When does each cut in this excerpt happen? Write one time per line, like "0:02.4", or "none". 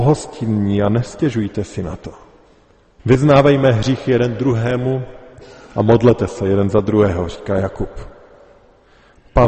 0:03.0